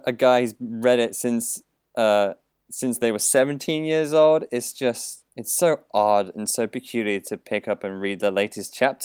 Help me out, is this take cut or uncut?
cut